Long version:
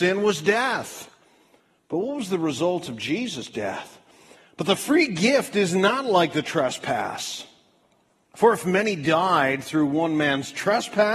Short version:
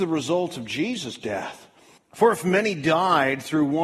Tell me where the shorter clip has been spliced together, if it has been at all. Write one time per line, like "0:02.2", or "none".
0:02.0